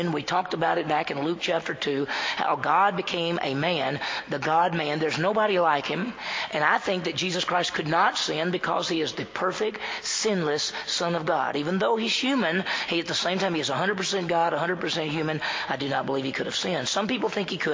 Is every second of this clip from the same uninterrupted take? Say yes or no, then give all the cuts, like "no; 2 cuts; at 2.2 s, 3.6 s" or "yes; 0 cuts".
yes; 0 cuts